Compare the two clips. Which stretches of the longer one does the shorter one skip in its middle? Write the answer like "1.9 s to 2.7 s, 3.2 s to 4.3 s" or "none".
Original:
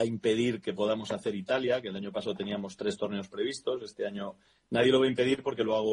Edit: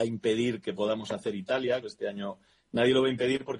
1.8 s to 3.8 s